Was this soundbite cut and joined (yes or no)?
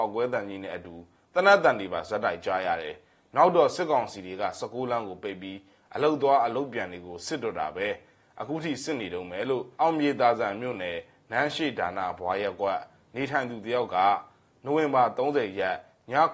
yes